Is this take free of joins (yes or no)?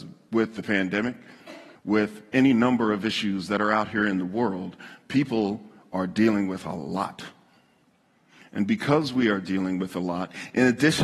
no